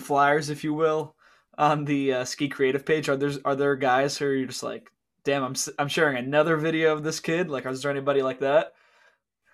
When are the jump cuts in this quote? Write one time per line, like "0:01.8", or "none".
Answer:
none